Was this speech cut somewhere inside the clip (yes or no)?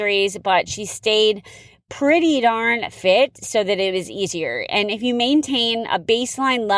no